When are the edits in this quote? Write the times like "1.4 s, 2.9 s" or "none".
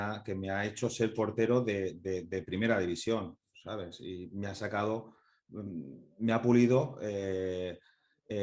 none